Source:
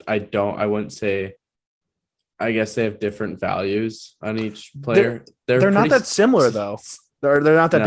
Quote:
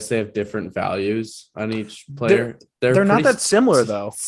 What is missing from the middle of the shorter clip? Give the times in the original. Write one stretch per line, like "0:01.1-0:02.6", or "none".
none